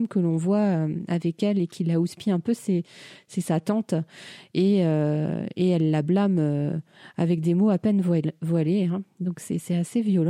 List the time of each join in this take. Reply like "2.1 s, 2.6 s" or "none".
none